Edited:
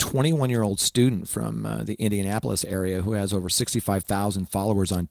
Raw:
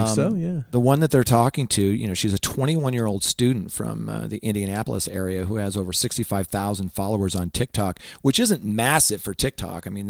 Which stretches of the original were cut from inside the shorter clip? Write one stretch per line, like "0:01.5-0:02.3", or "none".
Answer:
none